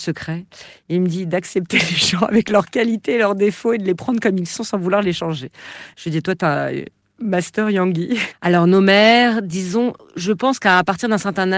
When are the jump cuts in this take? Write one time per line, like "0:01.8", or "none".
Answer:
0:08.3